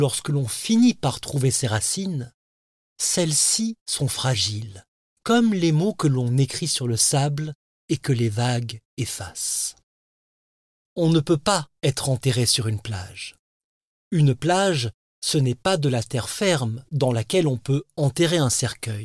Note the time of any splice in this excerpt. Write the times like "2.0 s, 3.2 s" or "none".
10.7 s

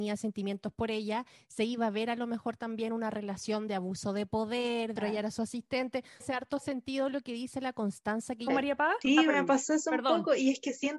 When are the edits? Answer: 5.0 s, 6.2 s, 8.5 s

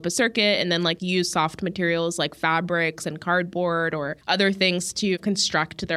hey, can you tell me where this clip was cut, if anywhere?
4.2 s

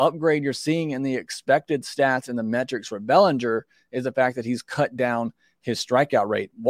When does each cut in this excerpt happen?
none

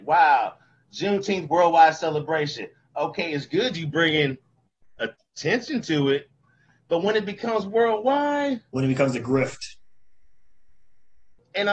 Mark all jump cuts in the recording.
none

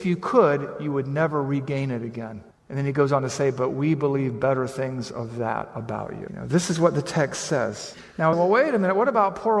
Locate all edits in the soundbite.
8.3 s

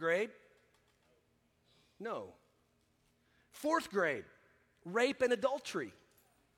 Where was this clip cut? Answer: none

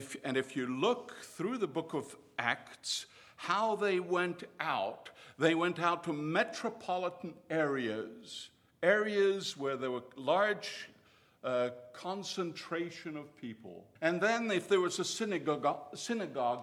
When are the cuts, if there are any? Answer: 14.0 s

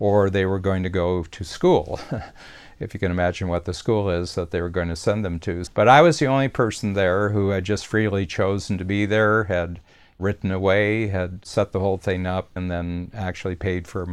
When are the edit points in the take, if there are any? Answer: 5.7 s, 12.6 s

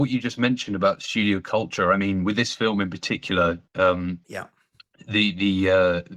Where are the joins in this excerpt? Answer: none

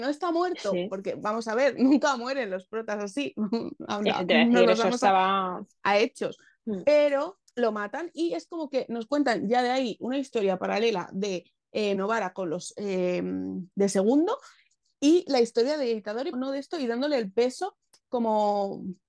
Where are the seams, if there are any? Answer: 12.0 s, 16.3 s

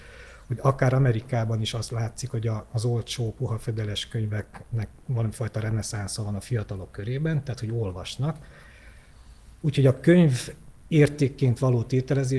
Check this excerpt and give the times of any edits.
none

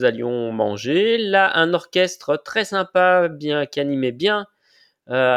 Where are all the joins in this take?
none

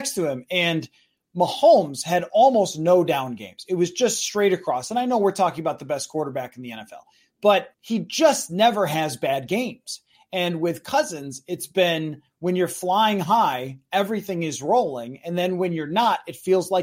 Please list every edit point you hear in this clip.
7.7 s

